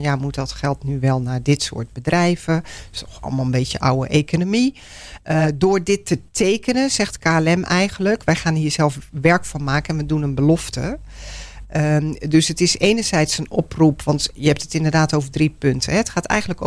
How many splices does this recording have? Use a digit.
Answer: 0